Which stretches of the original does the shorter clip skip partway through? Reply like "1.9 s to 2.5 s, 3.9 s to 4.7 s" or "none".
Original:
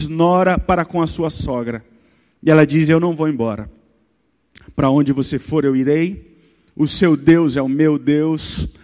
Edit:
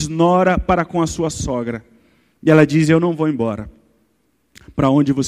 none